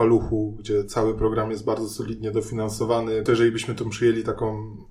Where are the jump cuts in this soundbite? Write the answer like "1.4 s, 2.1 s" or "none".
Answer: 3.3 s